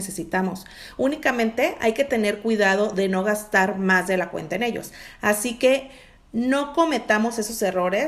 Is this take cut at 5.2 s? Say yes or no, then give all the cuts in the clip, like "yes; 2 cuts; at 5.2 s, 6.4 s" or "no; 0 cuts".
no; 0 cuts